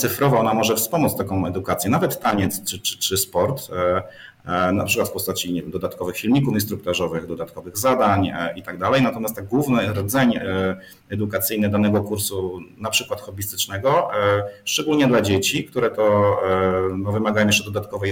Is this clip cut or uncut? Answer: uncut